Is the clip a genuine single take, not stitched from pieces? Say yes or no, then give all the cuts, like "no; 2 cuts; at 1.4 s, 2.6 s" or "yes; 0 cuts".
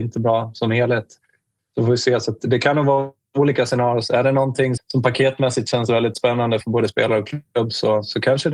no; 2 cuts; at 4.8 s, 6.6 s